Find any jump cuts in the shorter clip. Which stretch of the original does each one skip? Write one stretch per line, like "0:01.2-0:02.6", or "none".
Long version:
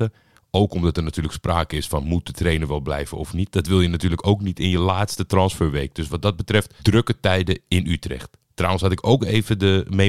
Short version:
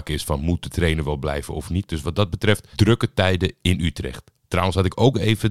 0:03.5-0:05.9

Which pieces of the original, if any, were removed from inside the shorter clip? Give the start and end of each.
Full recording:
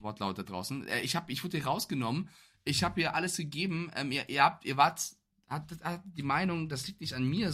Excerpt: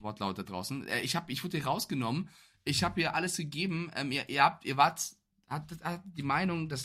none

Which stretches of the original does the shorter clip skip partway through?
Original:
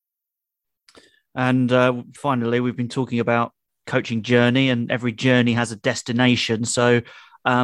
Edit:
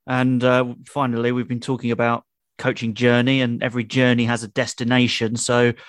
none

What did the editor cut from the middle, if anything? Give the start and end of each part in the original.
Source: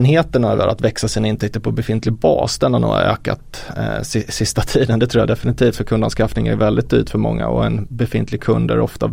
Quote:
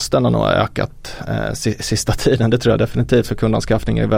none

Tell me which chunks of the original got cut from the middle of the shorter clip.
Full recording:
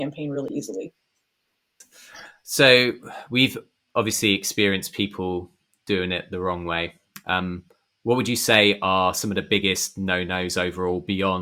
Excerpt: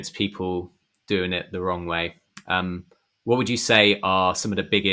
none

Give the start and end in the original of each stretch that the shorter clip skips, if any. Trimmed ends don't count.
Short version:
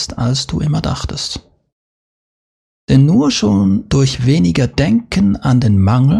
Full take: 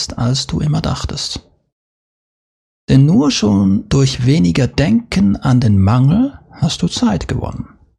none

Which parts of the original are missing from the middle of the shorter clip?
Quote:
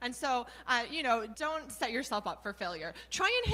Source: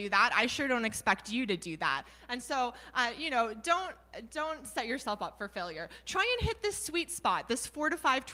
0:03.6-0:04.3

